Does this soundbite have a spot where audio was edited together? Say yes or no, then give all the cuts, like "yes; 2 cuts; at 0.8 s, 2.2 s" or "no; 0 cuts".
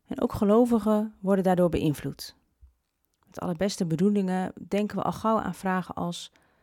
no; 0 cuts